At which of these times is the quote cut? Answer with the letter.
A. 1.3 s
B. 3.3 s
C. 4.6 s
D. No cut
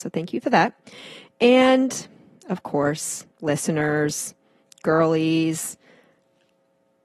B